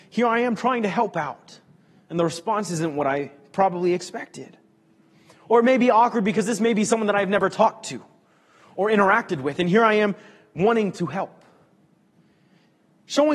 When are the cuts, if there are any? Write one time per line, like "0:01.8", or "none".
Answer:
none